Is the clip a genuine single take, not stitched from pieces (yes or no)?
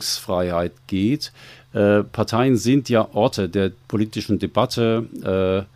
yes